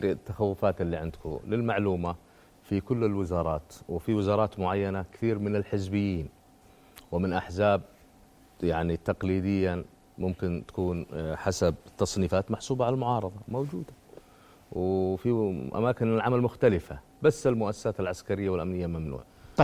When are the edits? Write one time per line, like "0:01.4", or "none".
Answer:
none

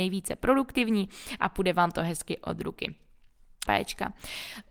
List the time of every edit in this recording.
0:03.7

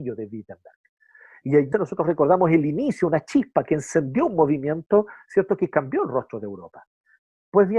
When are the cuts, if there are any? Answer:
0:01.7

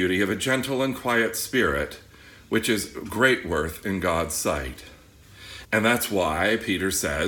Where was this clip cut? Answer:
0:05.6

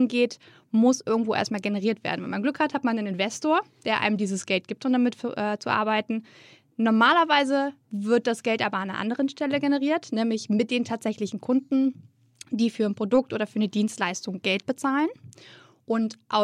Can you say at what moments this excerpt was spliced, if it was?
none

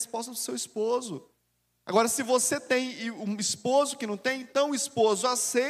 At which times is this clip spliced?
none

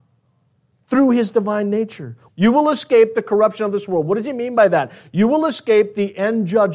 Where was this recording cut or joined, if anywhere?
0:02.3

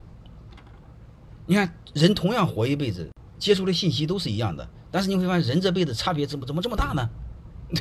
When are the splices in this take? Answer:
none

